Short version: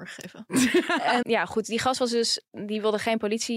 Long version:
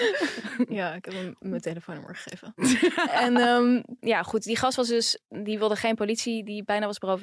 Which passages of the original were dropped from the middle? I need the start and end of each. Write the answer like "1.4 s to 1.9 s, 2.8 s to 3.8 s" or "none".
3.3 s to 4.0 s